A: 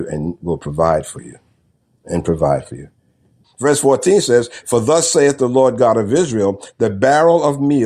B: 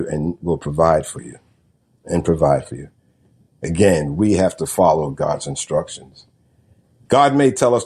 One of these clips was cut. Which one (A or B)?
A